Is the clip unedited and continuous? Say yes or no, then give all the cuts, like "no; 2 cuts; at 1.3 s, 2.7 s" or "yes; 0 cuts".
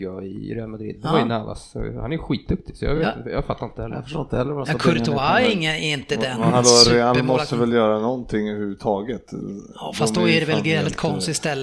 yes; 0 cuts